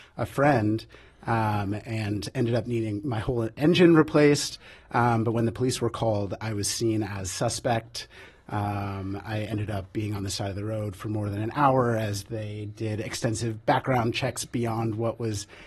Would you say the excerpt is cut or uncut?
uncut